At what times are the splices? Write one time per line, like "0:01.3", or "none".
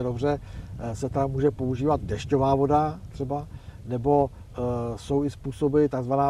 none